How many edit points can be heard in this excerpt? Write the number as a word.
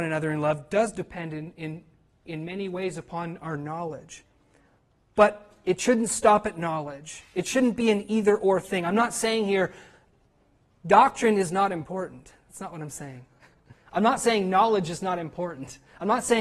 zero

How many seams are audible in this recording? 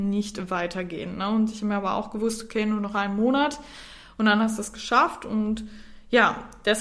zero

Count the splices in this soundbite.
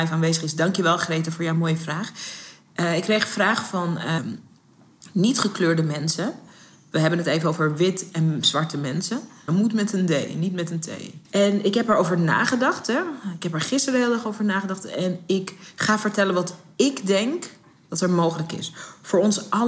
three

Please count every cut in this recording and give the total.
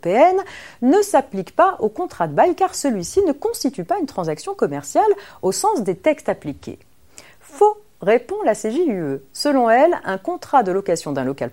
zero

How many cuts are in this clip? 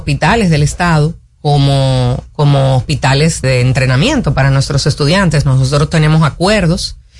one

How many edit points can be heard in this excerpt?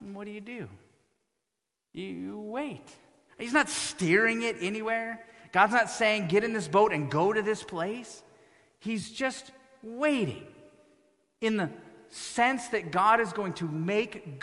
one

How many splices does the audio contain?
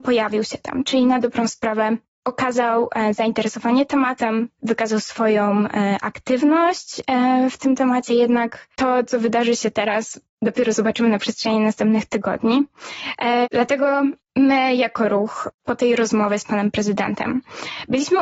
two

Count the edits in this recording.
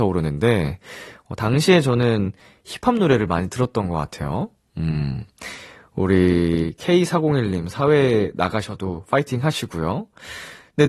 zero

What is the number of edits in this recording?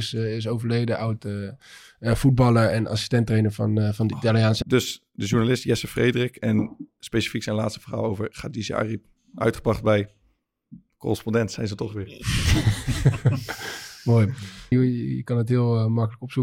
two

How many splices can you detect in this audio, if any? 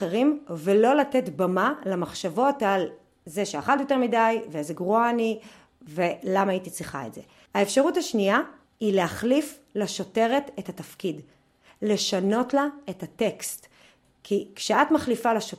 zero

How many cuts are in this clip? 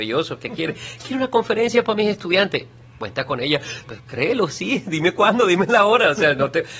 one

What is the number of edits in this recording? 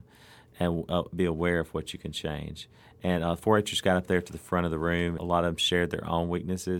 one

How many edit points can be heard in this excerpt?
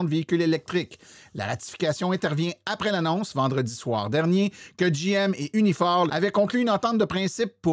one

